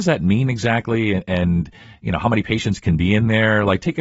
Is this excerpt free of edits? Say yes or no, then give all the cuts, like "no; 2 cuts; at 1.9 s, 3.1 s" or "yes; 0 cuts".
yes; 0 cuts